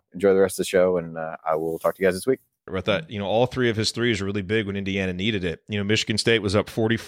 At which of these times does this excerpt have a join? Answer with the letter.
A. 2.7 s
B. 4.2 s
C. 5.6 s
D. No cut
A